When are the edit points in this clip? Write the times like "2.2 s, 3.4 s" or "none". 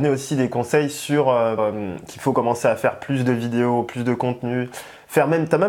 1.6 s

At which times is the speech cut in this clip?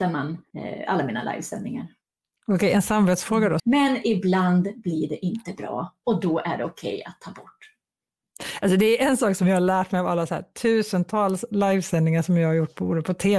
3.6 s

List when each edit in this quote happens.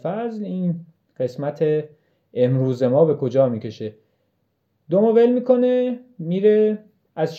none

